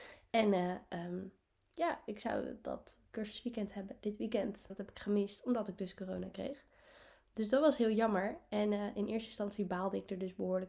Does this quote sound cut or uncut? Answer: cut